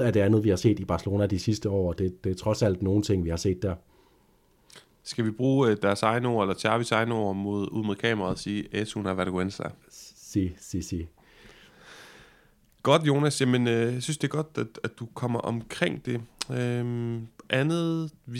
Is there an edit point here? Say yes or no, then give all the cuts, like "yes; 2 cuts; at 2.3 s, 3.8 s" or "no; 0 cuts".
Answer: no; 0 cuts